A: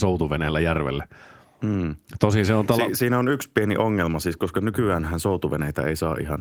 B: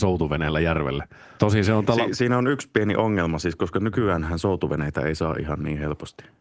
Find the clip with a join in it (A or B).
B